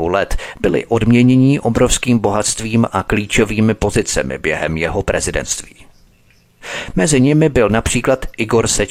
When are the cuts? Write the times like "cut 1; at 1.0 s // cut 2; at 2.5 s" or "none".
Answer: none